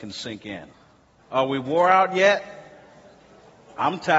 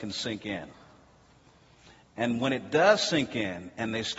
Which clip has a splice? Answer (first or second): first